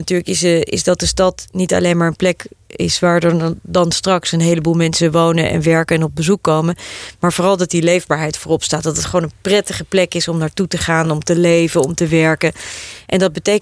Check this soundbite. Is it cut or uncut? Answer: uncut